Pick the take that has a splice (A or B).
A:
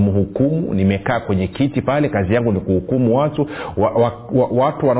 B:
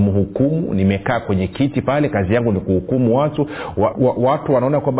B